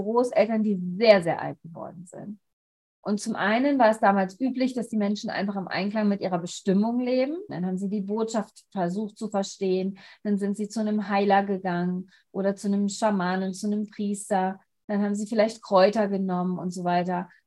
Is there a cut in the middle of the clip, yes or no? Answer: yes